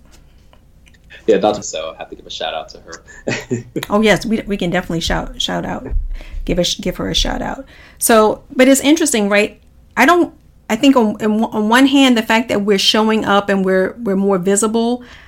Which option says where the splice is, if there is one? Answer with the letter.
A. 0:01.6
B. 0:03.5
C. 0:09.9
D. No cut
A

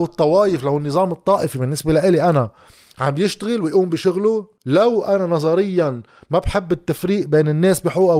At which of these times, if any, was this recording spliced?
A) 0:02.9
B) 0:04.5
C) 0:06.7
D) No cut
B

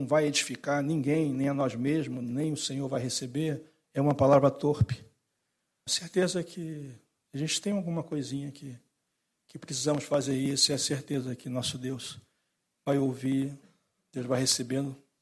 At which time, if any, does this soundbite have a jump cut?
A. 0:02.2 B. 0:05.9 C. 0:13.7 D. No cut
B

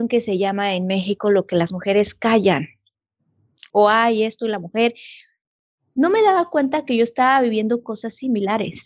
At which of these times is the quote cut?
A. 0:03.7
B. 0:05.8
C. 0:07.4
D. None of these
A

